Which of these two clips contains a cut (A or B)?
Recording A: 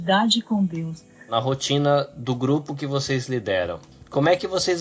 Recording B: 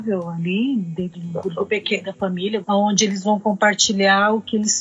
B